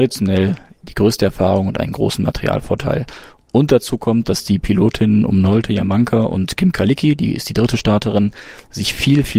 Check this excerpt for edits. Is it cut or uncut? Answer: uncut